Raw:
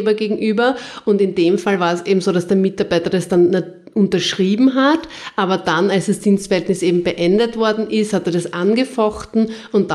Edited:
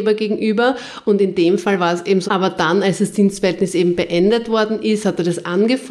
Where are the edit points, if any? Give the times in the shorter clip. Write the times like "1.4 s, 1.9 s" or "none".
2.3 s